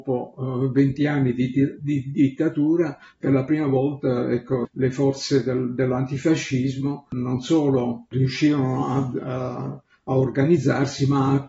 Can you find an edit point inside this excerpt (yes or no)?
yes